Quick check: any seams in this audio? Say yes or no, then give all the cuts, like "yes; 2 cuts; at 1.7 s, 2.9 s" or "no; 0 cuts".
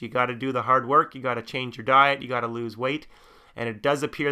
no; 0 cuts